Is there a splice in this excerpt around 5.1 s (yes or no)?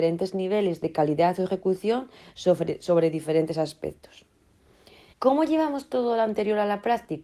yes